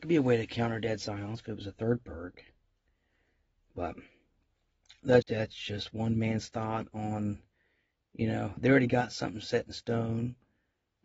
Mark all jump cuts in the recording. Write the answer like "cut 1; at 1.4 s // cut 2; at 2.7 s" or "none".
cut 1; at 5.2 s // cut 2; at 8.6 s